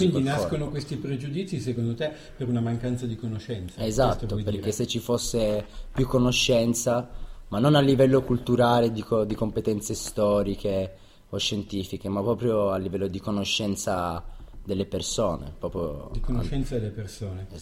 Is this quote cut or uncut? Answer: uncut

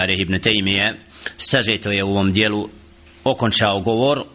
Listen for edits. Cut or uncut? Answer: uncut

